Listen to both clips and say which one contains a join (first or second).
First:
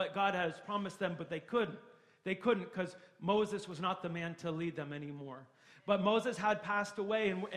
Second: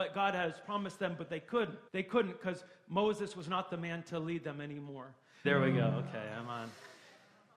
second